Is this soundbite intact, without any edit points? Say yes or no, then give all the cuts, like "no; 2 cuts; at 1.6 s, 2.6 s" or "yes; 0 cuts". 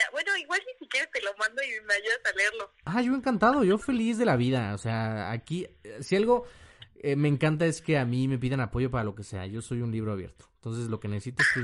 yes; 0 cuts